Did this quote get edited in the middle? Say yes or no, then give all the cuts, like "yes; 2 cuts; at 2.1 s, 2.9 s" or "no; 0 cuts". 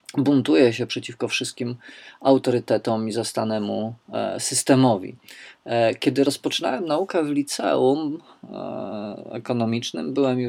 no; 0 cuts